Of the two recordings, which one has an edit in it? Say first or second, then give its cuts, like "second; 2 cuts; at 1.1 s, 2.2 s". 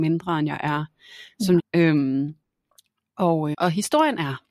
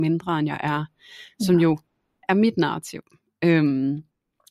first; 2 cuts; at 1.6 s, 3.5 s